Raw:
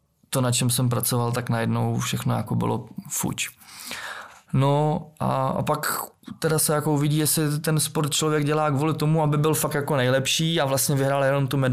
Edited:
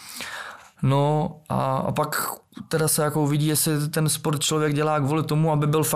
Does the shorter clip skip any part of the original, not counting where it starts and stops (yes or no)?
no